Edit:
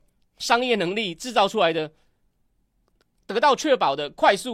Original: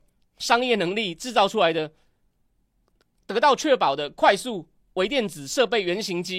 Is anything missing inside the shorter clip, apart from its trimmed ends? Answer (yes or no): no